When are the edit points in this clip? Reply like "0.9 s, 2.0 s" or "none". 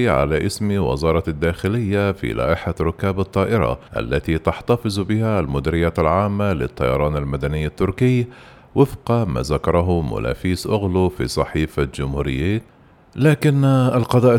3.9 s